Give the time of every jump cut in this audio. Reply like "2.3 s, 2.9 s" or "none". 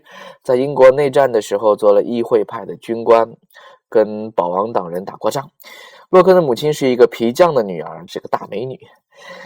8.1 s